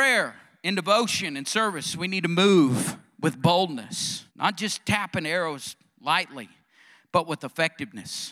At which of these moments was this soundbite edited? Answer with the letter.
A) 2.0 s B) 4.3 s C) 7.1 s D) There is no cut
B